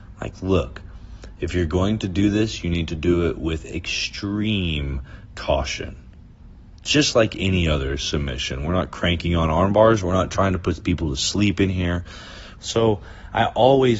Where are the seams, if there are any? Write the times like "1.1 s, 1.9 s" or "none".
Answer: 10.0 s, 12.6 s